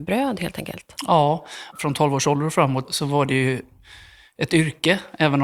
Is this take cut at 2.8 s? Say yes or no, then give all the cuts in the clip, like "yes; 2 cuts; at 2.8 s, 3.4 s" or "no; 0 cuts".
yes; 2 cuts; at 1.7 s, 2.8 s